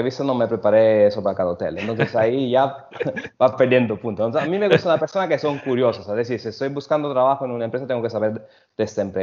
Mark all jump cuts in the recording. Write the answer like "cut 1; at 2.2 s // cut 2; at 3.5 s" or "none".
none

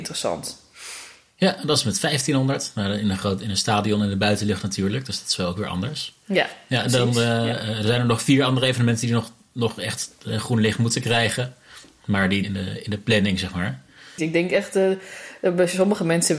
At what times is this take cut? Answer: cut 1; at 12.4 s // cut 2; at 14.2 s

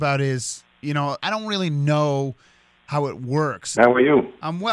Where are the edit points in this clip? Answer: cut 1; at 1.2 s // cut 2; at 3.8 s

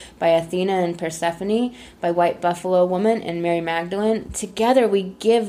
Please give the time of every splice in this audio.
cut 1; at 4.3 s

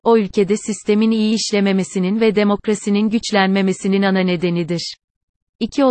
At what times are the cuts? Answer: none

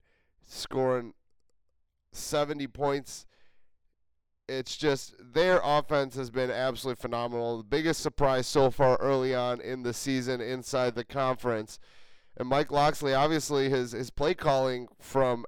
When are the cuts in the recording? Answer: none

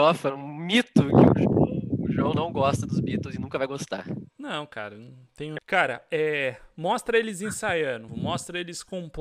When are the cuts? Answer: cut 1; at 5.6 s // cut 2; at 8.1 s

